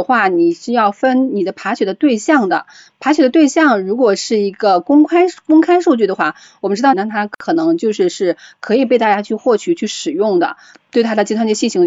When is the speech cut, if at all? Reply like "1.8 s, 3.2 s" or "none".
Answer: 6.9 s, 10.7 s